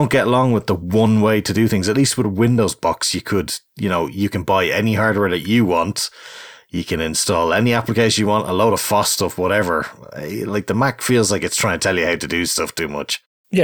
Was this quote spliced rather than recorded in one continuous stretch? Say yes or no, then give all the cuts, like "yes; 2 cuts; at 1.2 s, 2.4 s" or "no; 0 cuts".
no; 0 cuts